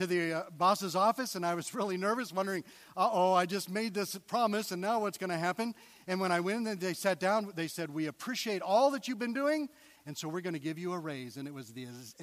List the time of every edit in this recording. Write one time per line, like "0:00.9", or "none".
none